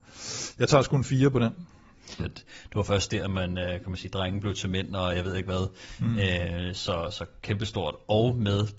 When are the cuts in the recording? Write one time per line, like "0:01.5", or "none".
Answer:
0:02.2

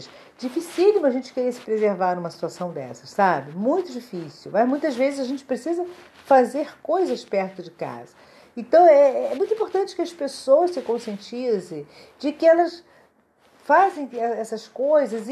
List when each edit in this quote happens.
none

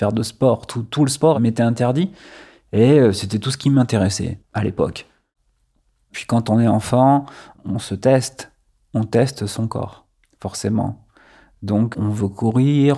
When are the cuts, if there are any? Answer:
none

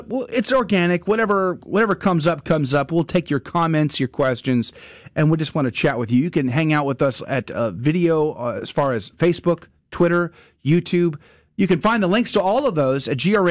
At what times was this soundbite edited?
none

